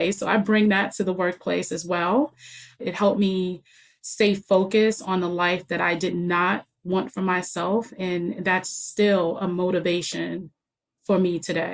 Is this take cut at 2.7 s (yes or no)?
yes